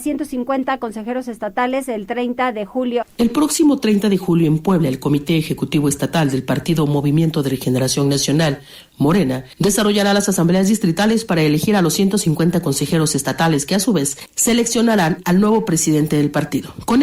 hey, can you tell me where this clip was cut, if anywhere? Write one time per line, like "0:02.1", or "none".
0:03.0
0:14.3